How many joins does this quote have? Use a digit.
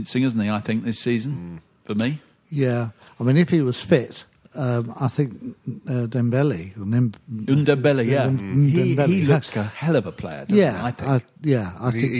1